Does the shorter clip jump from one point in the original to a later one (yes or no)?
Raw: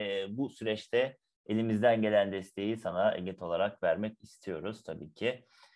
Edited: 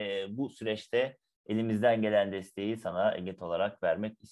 no